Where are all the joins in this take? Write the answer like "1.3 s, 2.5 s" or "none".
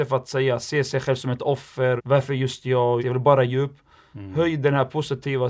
2.0 s, 3.0 s